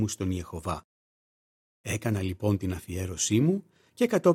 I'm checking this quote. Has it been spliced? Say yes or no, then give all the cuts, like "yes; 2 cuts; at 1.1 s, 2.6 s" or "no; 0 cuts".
no; 0 cuts